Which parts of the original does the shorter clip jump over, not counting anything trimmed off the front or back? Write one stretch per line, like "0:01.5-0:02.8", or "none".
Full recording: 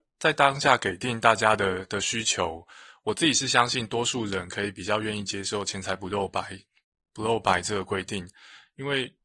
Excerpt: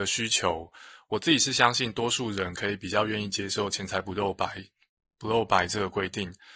none